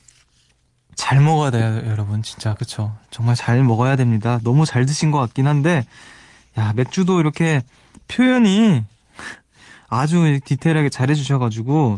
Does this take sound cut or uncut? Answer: cut